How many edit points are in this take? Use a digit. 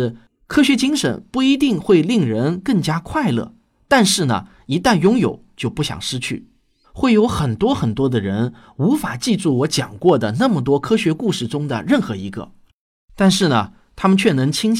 1